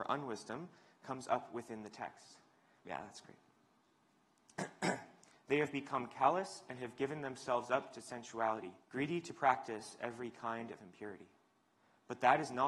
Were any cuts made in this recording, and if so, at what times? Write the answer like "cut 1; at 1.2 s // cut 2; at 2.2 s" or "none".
cut 1; at 2.8 s // cut 2; at 5.3 s // cut 3; at 8.8 s